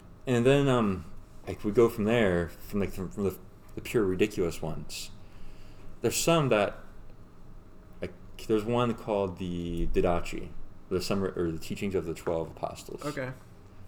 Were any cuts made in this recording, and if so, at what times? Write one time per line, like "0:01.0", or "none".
0:01.4